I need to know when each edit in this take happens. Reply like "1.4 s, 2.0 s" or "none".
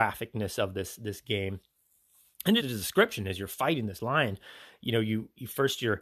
2.6 s